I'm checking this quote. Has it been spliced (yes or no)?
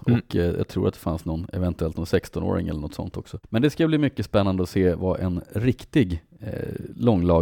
yes